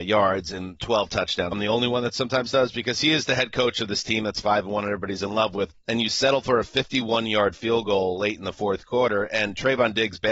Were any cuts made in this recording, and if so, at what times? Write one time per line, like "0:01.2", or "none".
0:01.5
0:05.7